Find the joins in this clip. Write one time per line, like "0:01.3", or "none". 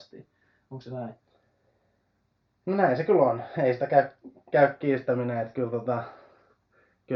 none